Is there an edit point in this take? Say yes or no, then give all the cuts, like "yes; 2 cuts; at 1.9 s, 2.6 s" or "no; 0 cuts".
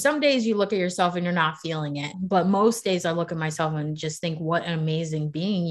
yes; 1 cut; at 2.1 s